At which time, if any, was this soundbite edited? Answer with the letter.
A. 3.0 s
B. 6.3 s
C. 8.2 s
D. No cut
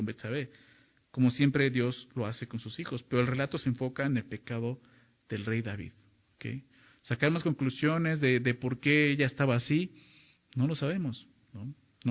D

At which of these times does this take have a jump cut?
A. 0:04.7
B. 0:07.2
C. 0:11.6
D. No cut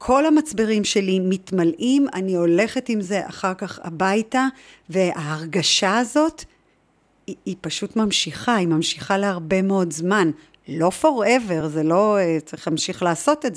D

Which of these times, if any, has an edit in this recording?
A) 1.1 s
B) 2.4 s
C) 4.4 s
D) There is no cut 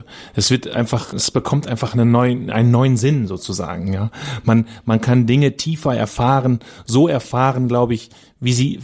A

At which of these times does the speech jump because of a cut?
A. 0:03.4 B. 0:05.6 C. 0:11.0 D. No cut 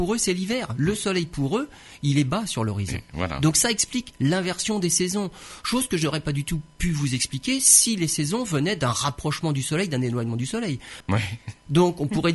C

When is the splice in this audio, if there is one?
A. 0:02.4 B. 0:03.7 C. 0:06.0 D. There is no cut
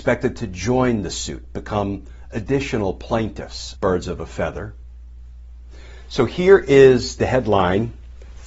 B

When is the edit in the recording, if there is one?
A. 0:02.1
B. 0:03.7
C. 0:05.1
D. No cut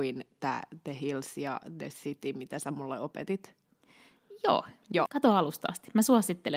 C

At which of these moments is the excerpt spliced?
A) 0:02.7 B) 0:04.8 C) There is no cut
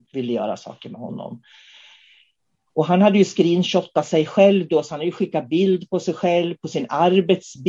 C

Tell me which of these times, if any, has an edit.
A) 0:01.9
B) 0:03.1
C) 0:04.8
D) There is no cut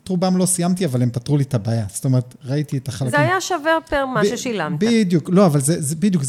D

